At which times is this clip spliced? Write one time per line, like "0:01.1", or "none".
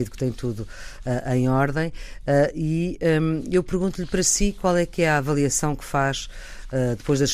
none